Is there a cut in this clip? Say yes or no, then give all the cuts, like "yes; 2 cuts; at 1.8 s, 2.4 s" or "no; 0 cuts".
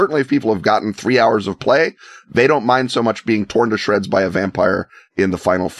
no; 0 cuts